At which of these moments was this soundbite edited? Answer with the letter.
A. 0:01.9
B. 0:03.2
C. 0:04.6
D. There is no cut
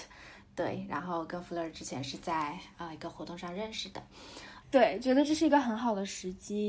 C